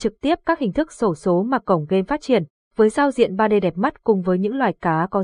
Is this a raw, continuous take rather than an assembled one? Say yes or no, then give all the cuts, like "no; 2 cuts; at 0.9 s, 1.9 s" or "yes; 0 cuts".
no; 1 cut; at 2.6 s